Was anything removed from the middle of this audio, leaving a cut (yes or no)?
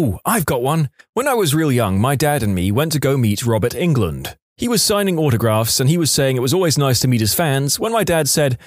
no